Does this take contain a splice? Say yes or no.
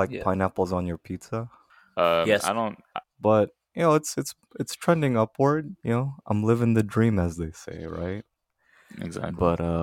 yes